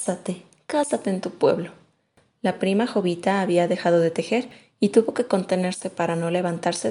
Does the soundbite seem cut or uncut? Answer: uncut